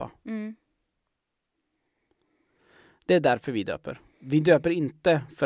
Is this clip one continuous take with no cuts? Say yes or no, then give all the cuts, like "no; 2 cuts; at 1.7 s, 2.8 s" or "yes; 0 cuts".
yes; 0 cuts